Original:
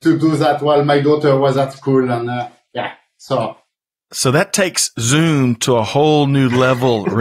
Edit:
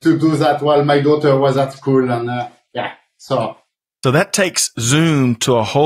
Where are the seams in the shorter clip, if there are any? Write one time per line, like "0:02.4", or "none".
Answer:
0:04.0